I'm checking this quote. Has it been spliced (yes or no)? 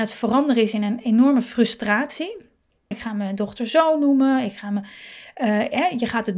yes